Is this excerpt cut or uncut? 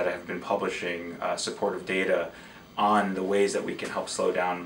uncut